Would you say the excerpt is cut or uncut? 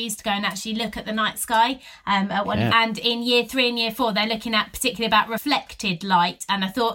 cut